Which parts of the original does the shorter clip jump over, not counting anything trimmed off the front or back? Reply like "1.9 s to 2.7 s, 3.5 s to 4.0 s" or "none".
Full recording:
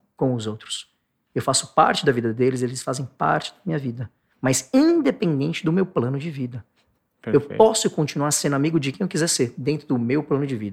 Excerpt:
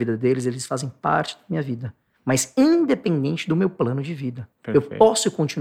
6.7 s to 7.1 s